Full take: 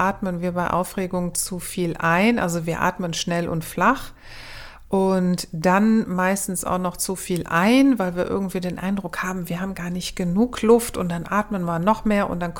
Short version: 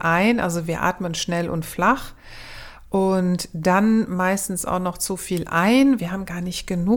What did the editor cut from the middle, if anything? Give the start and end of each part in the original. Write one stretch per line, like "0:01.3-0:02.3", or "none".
0:08.0-0:09.5